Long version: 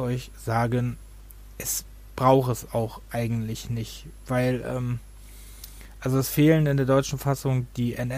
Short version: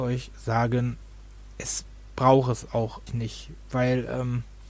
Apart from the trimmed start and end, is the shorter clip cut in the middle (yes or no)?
yes